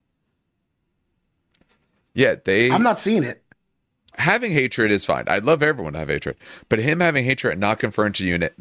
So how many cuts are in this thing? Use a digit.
1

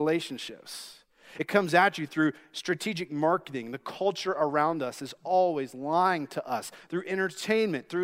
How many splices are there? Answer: 0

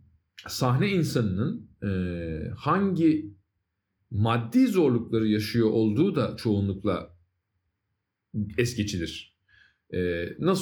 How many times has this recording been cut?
0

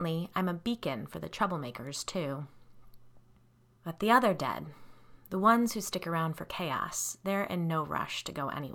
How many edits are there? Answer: 1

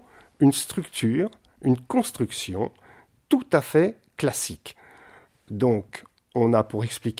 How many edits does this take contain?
0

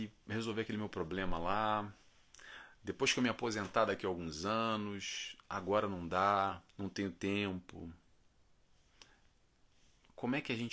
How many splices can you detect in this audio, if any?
1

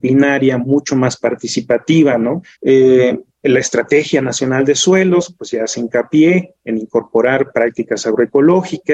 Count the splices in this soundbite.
1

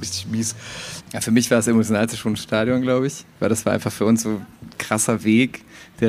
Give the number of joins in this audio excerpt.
1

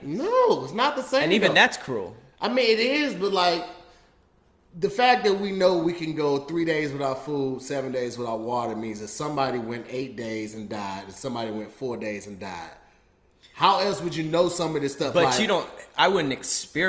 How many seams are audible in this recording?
0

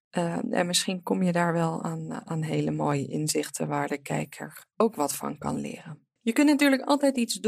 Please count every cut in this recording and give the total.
1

